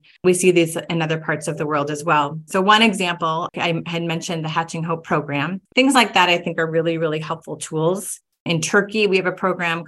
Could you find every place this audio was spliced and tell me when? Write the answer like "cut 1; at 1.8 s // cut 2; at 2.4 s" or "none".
cut 1; at 2.5 s // cut 2; at 5.7 s